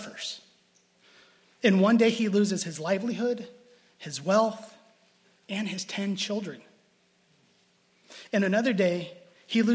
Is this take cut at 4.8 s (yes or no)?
no